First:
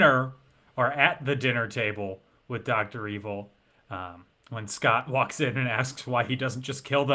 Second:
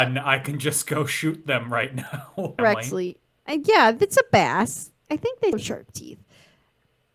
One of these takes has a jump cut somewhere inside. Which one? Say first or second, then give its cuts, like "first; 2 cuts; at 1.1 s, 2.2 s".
second; 2 cuts; at 2.6 s, 5.5 s